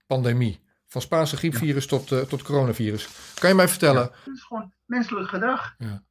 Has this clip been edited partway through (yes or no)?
yes